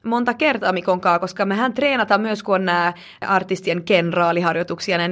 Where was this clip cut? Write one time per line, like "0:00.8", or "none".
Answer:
none